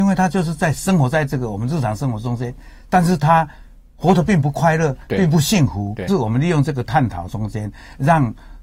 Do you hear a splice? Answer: yes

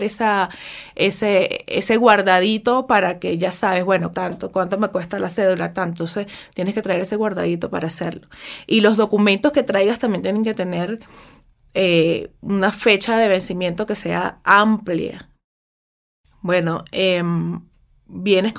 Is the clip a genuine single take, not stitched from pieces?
no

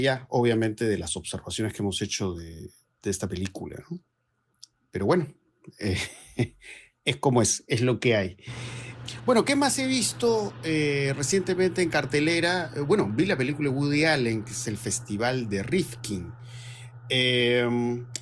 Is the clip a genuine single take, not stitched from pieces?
yes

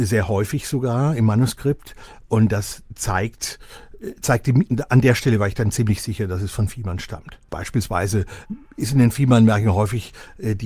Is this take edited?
yes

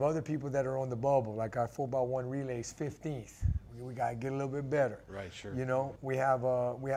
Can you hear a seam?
yes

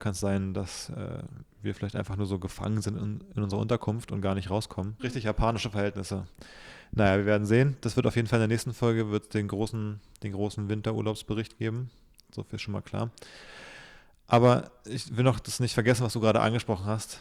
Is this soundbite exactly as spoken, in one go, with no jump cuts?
no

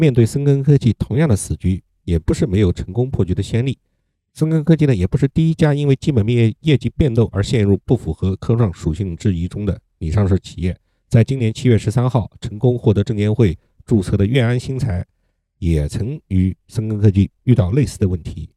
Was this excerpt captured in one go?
yes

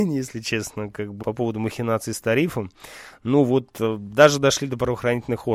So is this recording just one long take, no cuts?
no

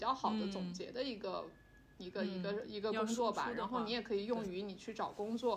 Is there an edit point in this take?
no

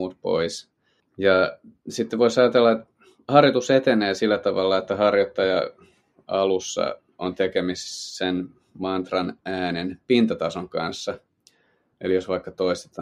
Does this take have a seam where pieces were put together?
yes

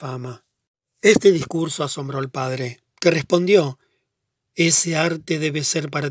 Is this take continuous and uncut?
yes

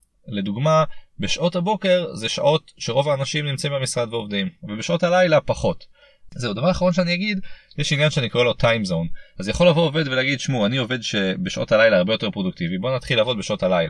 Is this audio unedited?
no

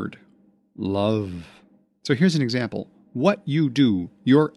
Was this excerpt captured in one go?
no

